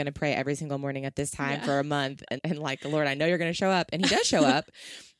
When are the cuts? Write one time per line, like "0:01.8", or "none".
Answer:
0:02.4